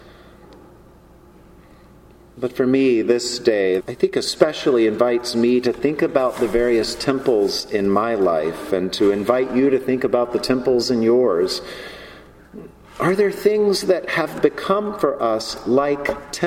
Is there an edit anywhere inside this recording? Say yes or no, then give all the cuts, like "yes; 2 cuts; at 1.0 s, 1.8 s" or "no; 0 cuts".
yes; 1 cut; at 3.8 s